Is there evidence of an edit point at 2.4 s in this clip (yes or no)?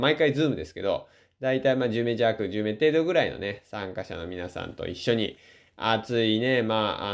no